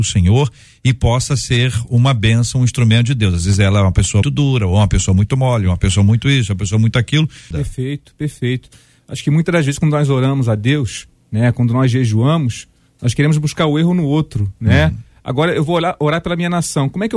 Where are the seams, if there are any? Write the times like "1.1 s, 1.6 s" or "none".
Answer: 4.2 s, 7.5 s